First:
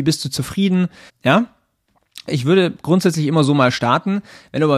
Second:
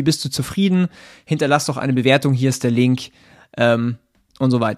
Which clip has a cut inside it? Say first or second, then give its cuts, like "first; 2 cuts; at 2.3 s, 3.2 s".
first; 2 cuts; at 1.1 s, 2.3 s